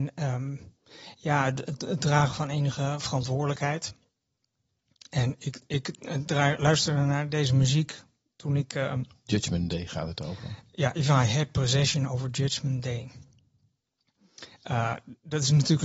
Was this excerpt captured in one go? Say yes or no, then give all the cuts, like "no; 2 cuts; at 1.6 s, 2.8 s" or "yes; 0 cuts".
yes; 0 cuts